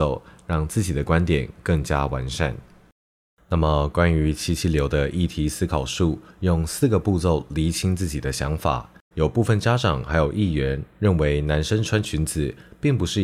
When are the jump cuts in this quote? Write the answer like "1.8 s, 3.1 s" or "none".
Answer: 9.1 s

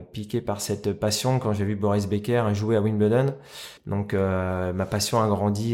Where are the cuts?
3.8 s

